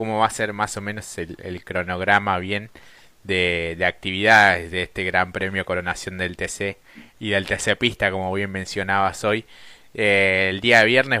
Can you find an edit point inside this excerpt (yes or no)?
no